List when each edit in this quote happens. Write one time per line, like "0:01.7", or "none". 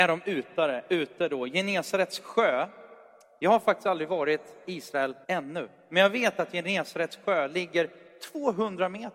0:05.2